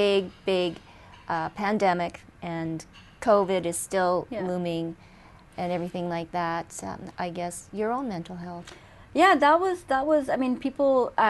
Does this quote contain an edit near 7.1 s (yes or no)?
yes